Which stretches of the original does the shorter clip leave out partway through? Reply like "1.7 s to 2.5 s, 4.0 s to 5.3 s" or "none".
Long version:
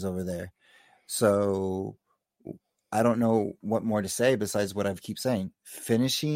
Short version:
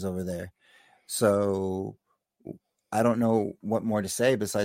none

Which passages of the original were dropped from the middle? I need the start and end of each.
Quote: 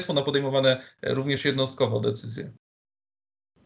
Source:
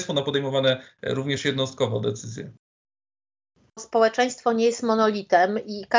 none

